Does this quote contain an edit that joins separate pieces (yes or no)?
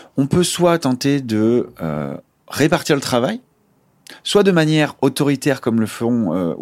no